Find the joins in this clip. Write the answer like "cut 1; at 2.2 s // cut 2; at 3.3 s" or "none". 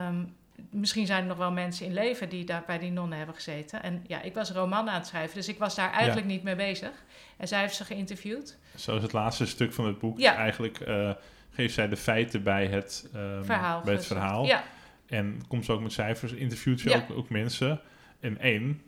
none